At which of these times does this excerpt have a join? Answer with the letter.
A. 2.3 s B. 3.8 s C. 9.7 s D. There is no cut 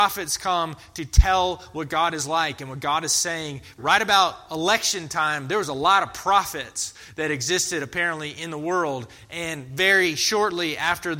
B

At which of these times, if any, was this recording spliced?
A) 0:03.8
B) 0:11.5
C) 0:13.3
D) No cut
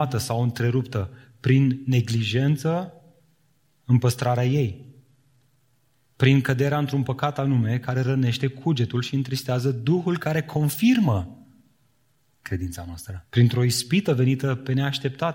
C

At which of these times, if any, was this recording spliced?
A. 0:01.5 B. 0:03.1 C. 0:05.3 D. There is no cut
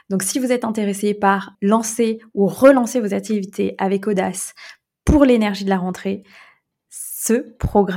A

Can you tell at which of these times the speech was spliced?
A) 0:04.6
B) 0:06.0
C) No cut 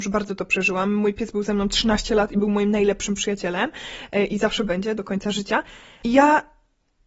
B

